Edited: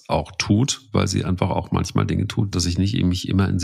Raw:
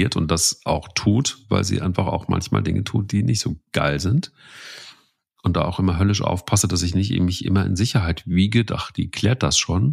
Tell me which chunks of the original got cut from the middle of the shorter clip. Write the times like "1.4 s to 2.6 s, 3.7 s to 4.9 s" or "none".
3.1 s to 6.7 s